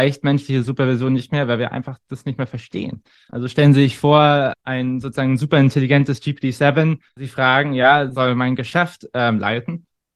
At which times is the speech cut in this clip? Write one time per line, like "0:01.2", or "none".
none